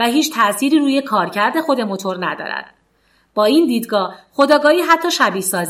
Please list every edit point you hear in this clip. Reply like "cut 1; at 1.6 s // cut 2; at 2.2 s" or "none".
none